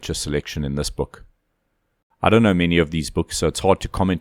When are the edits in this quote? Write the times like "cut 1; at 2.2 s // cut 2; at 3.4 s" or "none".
cut 1; at 2.0 s